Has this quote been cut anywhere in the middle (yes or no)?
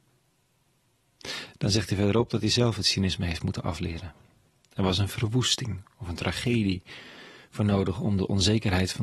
no